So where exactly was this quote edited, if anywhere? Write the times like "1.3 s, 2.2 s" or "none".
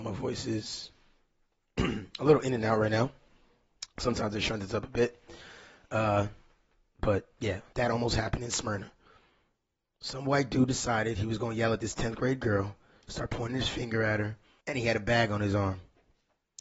7.7 s, 14.6 s